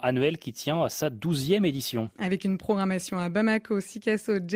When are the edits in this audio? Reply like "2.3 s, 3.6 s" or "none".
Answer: none